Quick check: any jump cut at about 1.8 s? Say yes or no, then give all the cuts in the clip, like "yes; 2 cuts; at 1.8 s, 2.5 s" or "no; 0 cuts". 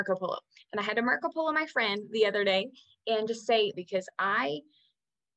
no; 1 cut; at 3.7 s